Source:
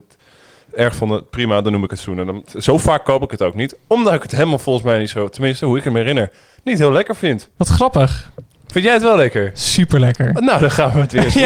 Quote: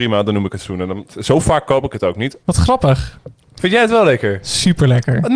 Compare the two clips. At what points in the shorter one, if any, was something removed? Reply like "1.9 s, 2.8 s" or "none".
2.4 s

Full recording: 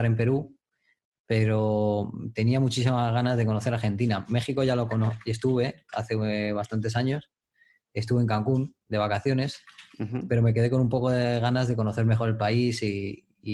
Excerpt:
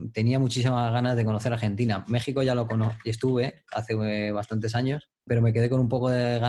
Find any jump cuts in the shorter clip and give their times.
5.3 s

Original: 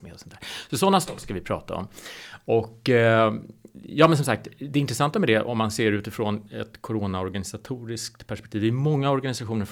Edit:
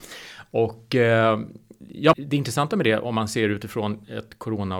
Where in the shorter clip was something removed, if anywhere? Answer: 2.1 s

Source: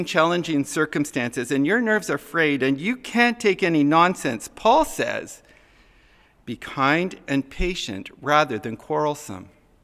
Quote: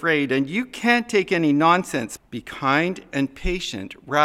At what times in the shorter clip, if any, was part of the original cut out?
2.2 s

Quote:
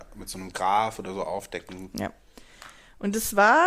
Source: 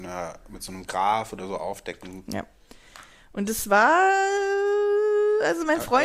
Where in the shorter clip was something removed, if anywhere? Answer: none

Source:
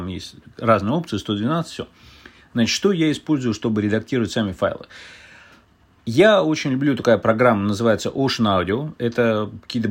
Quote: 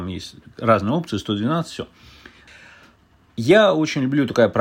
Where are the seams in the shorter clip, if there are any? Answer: 2.5 s

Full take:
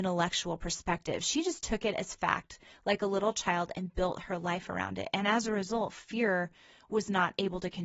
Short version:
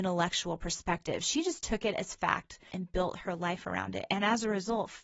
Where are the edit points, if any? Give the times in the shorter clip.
2.7 s

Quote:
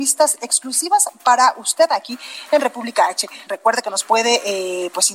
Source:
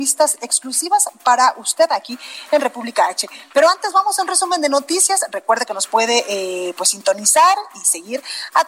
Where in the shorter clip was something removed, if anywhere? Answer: 3.5 s

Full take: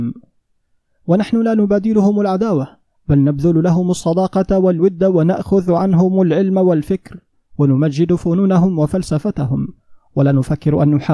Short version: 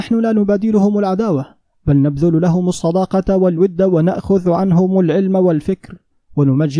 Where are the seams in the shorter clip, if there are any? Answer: none

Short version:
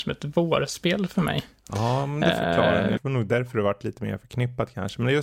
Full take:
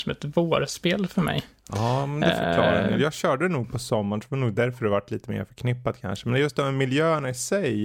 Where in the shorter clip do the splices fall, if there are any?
3.0 s

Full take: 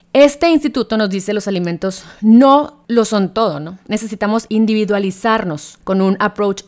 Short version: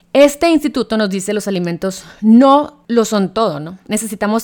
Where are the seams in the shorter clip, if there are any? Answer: none

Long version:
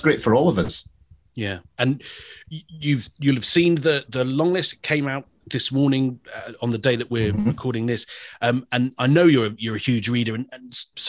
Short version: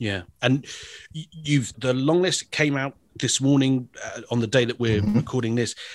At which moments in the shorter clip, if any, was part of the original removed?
1.7 s

